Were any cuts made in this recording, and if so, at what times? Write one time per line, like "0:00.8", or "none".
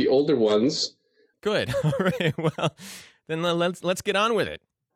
0:01.3